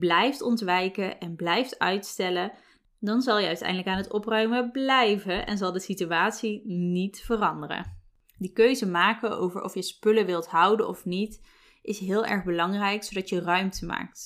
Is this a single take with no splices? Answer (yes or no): yes